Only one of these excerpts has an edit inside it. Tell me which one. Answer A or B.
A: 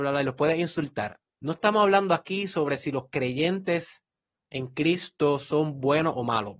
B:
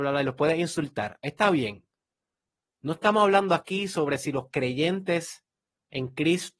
A